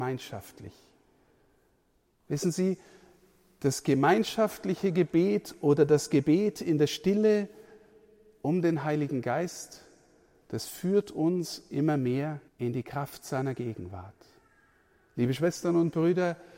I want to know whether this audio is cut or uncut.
cut